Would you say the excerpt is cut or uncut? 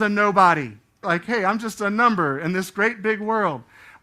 cut